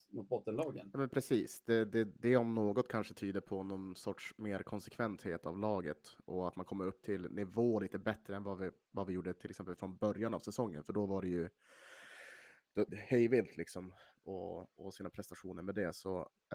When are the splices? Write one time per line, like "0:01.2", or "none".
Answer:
0:12.9